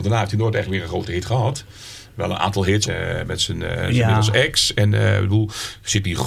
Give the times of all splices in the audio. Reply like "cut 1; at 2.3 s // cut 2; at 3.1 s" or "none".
cut 1; at 2.9 s